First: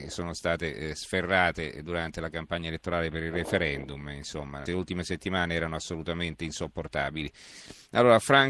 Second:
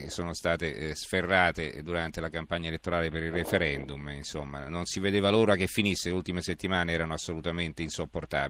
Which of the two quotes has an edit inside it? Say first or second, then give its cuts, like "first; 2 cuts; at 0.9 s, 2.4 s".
first; 1 cut; at 4.7 s